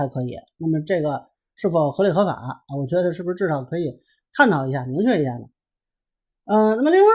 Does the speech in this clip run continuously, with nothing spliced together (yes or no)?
yes